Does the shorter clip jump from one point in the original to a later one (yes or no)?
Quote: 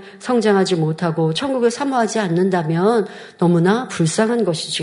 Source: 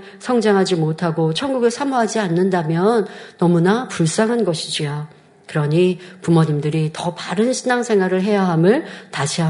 no